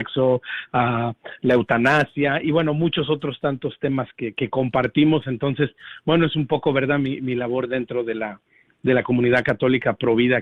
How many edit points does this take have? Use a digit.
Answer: 0